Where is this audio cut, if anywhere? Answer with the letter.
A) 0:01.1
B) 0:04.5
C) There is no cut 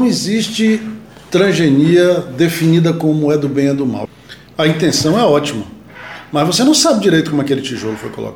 B